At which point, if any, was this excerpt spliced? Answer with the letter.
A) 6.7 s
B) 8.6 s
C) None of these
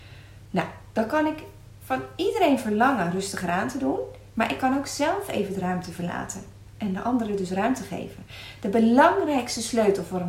C